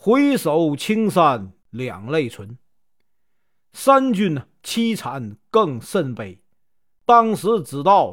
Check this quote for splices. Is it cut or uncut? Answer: uncut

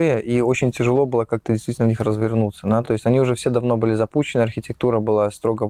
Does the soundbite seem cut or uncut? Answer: uncut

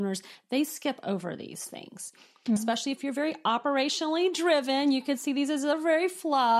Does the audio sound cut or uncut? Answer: cut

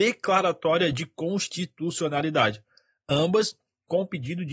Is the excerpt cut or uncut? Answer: uncut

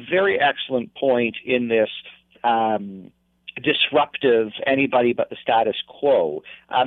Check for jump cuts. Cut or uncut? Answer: uncut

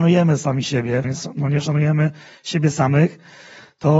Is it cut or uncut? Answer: cut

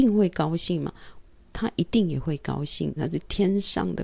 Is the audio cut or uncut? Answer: cut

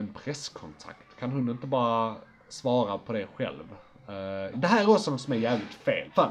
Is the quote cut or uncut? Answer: cut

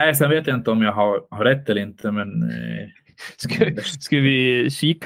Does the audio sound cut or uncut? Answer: uncut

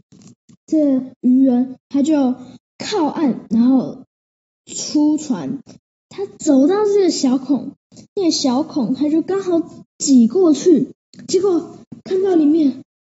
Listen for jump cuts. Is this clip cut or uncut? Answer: uncut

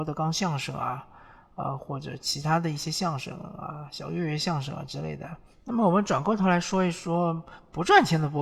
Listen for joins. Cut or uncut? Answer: cut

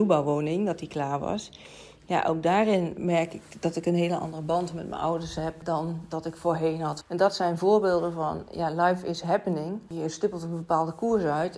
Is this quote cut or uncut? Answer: cut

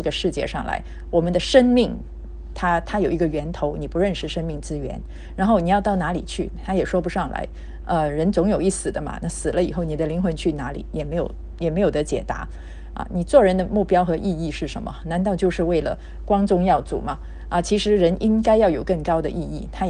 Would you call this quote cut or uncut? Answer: uncut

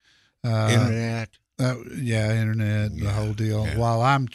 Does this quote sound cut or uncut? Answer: uncut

